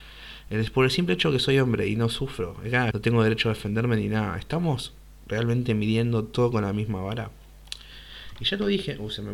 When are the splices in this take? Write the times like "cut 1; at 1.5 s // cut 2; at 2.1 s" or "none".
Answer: cut 1; at 2.9 s